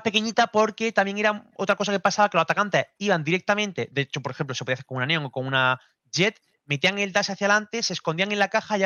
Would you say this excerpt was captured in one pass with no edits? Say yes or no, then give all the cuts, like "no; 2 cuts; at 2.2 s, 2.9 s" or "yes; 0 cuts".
yes; 0 cuts